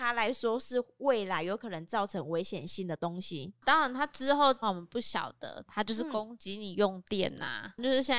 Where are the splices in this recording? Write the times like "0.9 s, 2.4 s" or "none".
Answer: 4.6 s, 5.7 s